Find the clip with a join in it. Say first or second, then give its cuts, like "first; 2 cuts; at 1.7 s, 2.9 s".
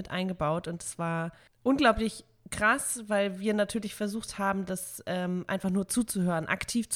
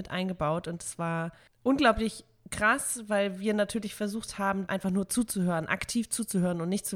second; 1 cut; at 4.7 s